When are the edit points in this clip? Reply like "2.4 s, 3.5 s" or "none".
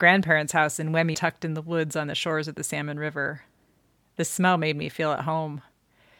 1.1 s